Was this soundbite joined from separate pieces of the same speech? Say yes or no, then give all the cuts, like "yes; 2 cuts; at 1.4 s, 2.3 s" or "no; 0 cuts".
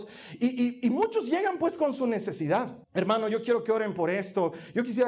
yes; 1 cut; at 2.8 s